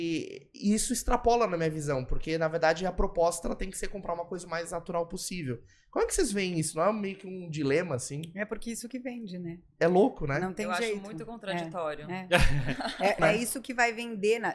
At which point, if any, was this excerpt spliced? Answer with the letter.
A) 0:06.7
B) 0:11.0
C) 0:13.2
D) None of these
C